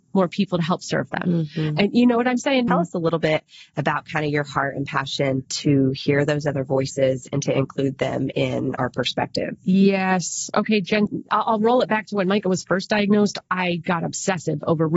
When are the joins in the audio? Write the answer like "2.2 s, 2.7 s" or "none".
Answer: 2.7 s